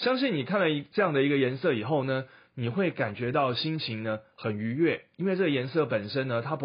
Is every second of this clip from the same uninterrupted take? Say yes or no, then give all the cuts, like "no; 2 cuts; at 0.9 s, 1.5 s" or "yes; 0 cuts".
yes; 0 cuts